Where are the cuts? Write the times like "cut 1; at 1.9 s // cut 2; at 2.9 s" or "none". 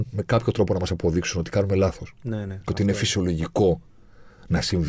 none